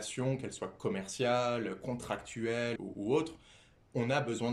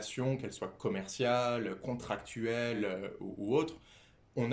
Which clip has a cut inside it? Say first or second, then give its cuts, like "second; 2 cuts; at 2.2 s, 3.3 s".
first; 1 cut; at 2.8 s